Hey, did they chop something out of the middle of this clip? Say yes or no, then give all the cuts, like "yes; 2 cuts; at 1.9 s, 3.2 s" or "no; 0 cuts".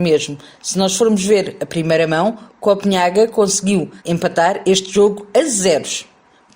yes; 1 cut; at 4.0 s